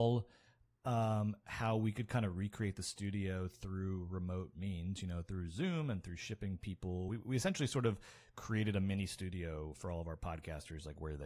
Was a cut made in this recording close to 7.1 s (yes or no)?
no